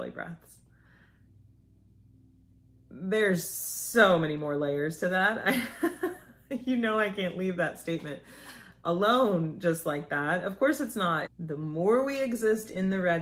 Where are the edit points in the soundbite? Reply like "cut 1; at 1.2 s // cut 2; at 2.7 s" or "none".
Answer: cut 1; at 11.3 s